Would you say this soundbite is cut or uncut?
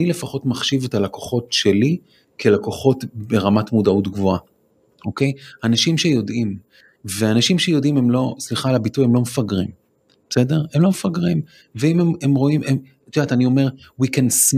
uncut